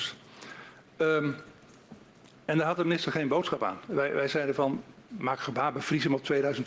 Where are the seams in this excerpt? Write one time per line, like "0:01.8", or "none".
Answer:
none